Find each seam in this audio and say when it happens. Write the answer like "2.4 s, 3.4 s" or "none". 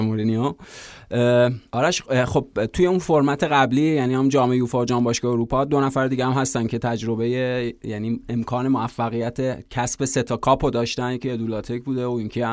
1.7 s